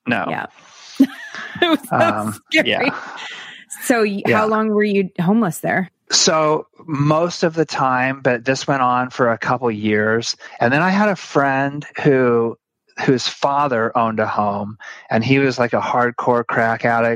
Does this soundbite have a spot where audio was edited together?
no; 0 cuts

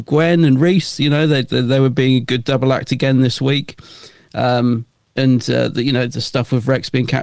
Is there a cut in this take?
no; 0 cuts

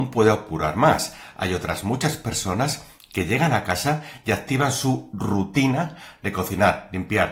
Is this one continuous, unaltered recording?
yes; 0 cuts

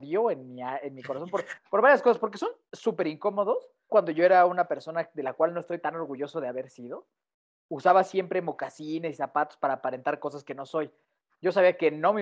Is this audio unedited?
no; 2 cuts; at 3.9 s, 11.3 s

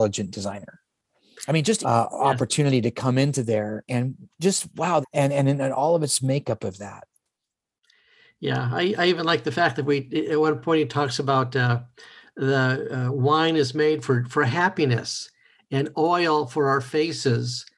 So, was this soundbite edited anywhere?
yes; 2 cuts; at 1.8 s, 5.0 s

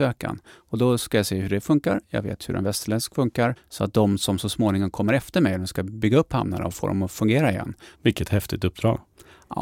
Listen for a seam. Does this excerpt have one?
yes; 2 cuts; at 3.6 s, 7.9 s

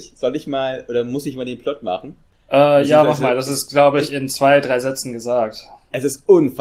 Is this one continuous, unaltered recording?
yes; 0 cuts

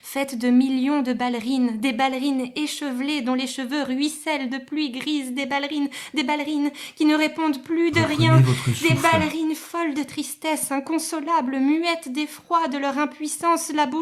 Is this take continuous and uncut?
yes; 0 cuts

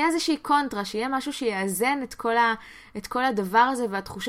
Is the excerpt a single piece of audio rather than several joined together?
yes; 0 cuts

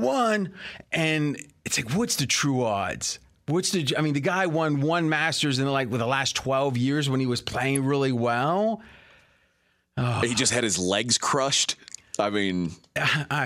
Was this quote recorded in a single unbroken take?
yes; 0 cuts

